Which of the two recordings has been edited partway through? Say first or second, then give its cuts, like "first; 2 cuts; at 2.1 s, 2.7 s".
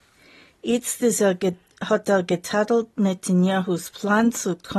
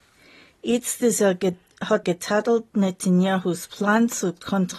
second; 1 cut; at 2.0 s